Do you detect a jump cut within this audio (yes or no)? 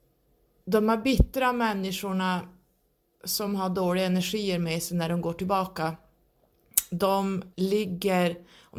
yes